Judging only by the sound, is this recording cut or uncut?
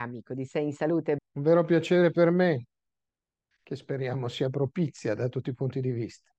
cut